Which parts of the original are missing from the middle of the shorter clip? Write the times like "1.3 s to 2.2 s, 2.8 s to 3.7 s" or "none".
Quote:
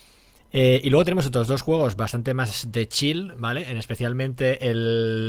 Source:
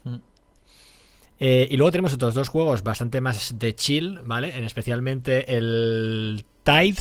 none